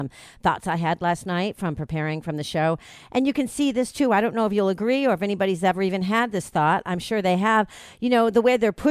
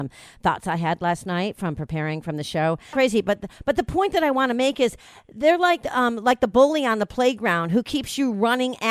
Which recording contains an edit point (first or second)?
second